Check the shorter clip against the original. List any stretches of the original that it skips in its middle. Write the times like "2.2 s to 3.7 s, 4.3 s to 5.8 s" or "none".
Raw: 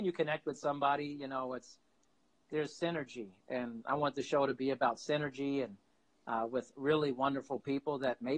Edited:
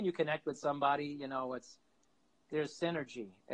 none